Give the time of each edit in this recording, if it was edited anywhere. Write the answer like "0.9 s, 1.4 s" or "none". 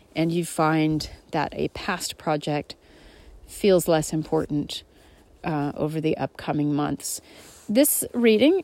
none